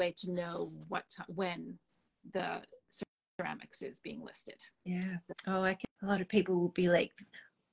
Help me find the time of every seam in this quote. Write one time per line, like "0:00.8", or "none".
0:06.0